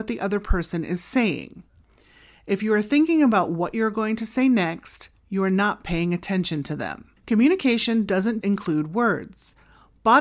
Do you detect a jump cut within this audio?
yes; 2 cuts; at 7.2 s, 8.4 s

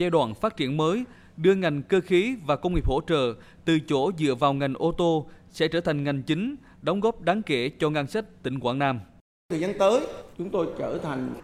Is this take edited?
no; 0 cuts

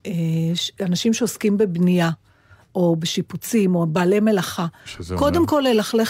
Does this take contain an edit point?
no; 0 cuts

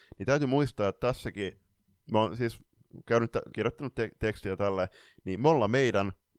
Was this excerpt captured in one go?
no; 1 cut; at 3.5 s

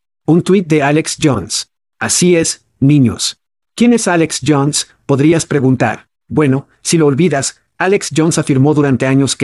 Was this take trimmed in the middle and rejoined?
yes; 2 cuts; at 3.6 s, 6.2 s

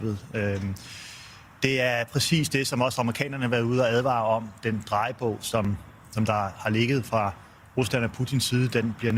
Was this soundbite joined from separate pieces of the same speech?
no; 0 cuts

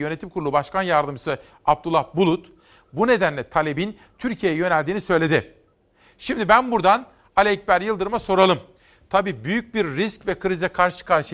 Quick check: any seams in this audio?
no; 0 cuts

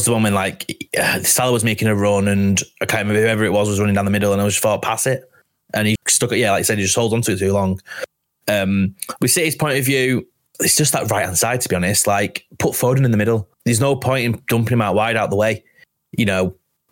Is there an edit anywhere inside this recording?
yes; 2 cuts; at 6.0 s, 13.5 s

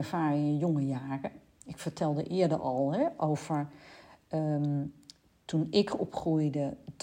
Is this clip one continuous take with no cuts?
yes; 0 cuts

